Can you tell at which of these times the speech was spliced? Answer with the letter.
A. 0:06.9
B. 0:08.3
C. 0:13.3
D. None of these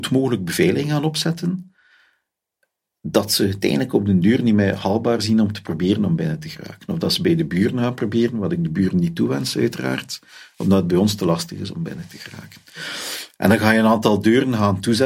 D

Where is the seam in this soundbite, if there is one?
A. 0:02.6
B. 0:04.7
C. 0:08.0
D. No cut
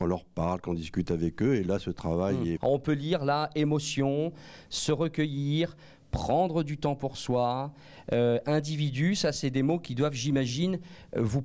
A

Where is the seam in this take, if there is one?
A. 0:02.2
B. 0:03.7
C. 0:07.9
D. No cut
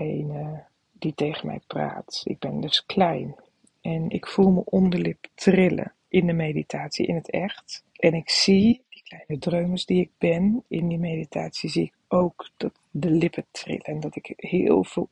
C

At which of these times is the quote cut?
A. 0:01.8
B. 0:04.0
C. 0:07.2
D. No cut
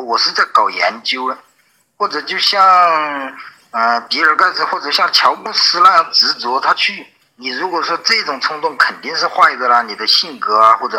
C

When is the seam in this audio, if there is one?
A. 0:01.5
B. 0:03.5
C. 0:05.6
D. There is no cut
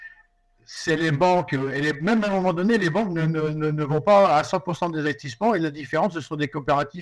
D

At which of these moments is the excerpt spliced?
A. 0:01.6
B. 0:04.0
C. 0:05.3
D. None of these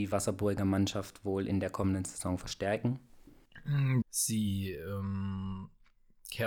B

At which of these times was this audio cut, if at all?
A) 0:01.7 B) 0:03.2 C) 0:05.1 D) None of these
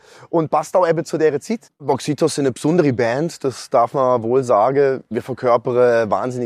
A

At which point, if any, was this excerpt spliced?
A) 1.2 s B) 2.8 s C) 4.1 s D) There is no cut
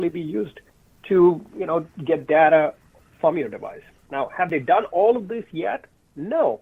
C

